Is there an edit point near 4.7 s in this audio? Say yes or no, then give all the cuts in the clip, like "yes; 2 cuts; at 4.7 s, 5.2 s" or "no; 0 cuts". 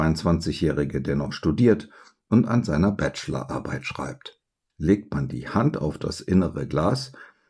yes; 1 cut; at 4.7 s